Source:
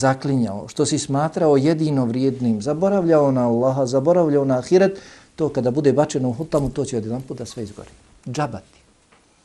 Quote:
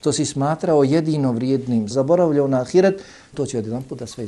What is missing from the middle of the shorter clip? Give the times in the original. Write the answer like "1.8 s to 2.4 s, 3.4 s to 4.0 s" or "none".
2.6 s to 3.9 s, 5.3 s to 6.7 s